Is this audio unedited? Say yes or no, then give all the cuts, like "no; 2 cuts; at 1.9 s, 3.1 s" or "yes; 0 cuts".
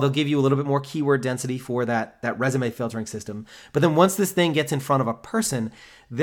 yes; 0 cuts